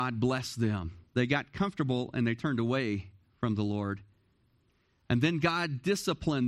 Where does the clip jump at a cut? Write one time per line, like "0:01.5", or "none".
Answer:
0:01.1